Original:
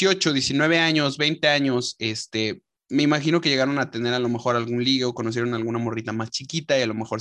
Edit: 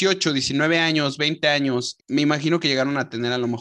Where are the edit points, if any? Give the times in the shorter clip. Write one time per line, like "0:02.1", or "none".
0:02.0